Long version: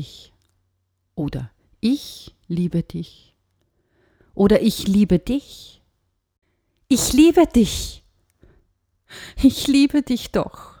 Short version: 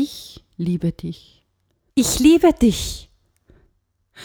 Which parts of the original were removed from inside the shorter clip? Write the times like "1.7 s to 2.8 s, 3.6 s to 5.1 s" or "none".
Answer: 3.8 s to 6.8 s